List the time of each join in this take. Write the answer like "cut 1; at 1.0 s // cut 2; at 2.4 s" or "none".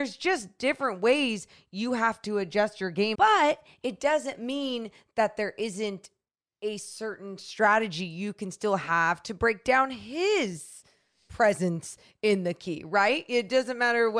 cut 1; at 3.1 s

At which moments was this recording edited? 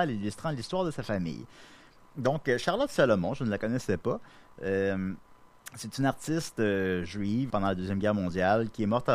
cut 1; at 7.5 s

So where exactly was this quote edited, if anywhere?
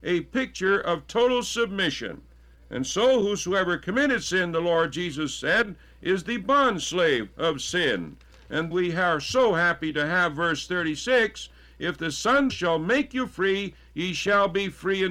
cut 1; at 8.7 s // cut 2; at 12.5 s

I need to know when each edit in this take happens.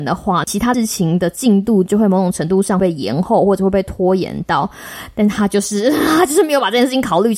none

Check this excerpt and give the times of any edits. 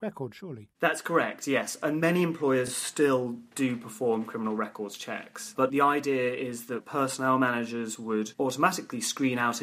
none

